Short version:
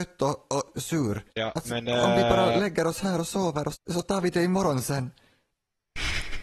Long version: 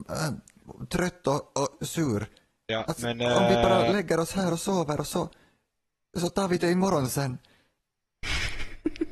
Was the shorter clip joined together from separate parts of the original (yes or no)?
yes